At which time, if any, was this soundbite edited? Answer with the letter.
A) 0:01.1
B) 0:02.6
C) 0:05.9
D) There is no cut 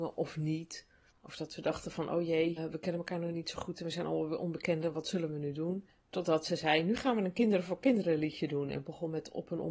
B